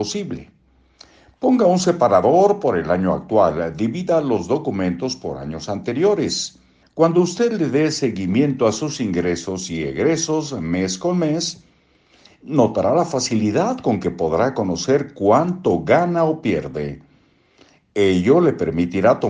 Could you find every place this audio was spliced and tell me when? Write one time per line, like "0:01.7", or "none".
0:06.8